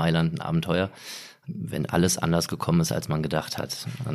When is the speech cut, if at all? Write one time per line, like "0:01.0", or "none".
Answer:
0:01.4